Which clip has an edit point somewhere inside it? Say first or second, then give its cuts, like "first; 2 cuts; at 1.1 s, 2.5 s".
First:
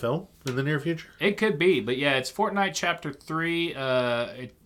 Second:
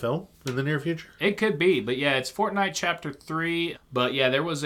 second; 1 cut; at 3.7 s